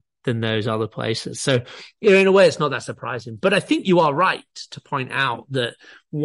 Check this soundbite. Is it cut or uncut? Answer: uncut